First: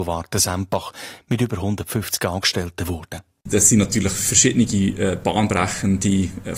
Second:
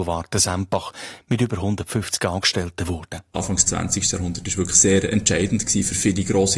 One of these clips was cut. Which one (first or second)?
second